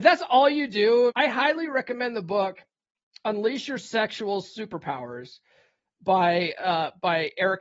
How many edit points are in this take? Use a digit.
1